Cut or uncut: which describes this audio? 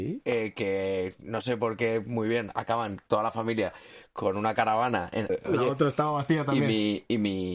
cut